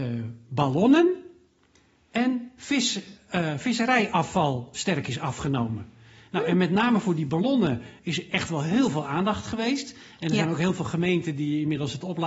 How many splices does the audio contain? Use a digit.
0